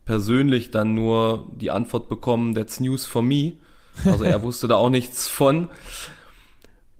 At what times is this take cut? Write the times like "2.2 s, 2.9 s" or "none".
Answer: none